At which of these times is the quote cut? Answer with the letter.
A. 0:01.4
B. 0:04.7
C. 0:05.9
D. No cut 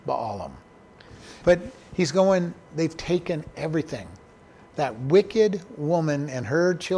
A